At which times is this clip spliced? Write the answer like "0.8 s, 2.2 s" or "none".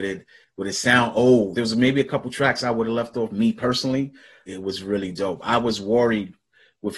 1.5 s, 4.5 s